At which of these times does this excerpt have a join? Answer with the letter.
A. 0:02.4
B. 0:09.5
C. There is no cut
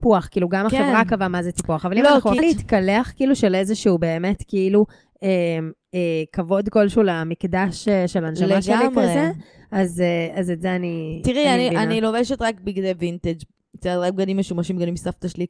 A